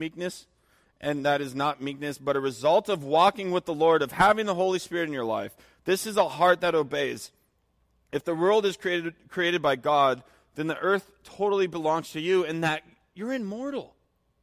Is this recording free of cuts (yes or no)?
yes